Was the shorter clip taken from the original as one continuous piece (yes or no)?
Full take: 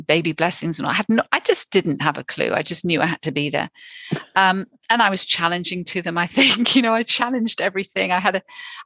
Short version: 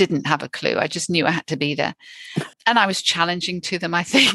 no